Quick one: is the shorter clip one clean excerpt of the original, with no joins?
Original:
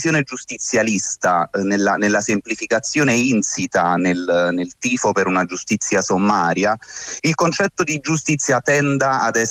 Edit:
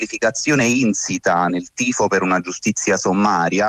no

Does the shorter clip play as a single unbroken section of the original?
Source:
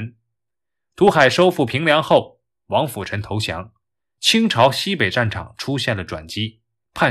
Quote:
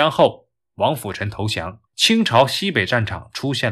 no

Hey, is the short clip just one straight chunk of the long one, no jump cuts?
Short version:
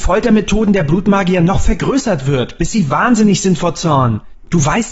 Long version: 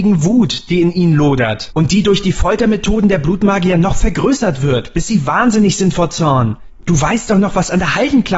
yes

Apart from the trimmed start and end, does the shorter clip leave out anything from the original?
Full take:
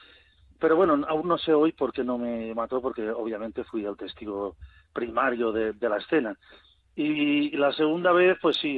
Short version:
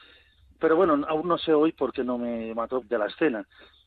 yes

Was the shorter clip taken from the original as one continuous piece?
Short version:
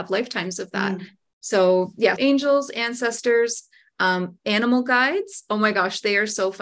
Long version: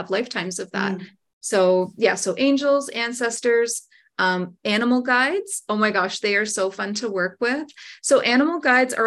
no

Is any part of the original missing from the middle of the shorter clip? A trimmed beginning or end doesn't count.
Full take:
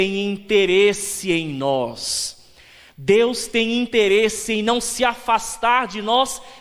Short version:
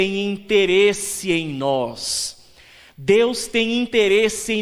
no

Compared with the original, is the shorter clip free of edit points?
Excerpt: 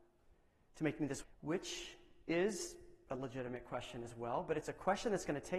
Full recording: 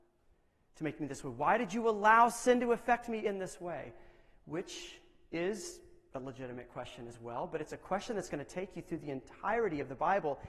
no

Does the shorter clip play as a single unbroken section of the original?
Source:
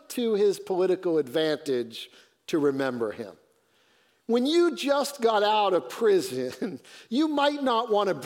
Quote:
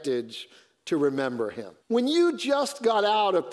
no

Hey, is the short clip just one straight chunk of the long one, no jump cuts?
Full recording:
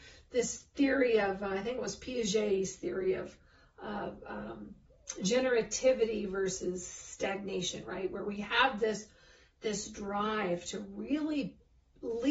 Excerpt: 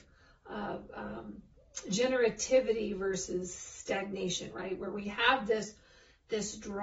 yes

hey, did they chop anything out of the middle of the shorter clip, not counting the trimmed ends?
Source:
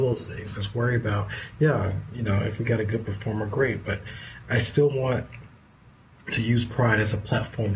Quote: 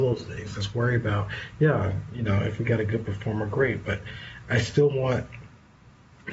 no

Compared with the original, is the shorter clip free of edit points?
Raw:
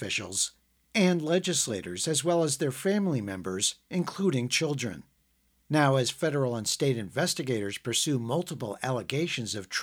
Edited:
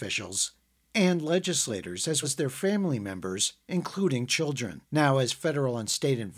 no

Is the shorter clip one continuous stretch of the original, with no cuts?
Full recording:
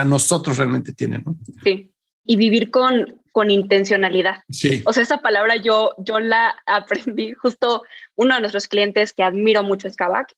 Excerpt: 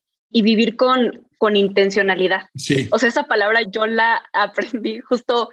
no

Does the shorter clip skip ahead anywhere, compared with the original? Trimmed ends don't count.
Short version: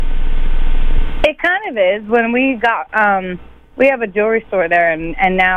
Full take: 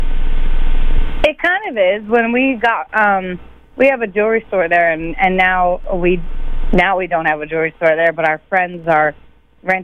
no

